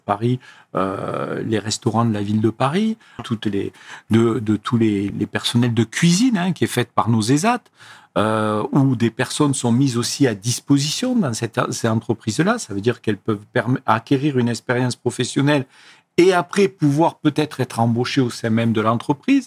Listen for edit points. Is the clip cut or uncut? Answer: cut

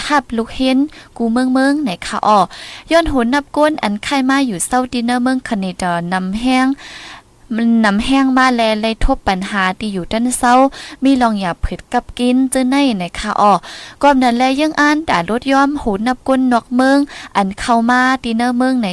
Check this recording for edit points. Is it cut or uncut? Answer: uncut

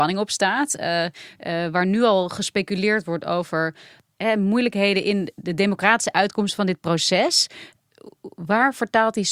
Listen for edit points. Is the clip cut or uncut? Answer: uncut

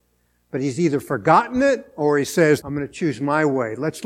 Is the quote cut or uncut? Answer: cut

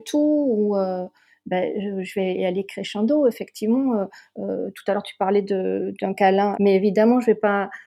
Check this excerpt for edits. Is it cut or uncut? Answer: cut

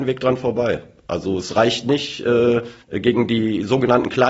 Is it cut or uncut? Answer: cut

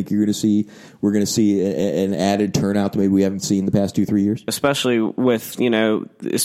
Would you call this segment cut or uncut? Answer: cut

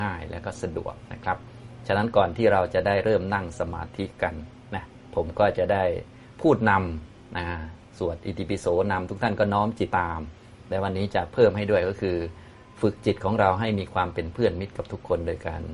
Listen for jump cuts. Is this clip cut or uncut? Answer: cut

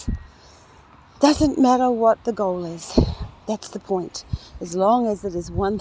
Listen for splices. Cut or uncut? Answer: uncut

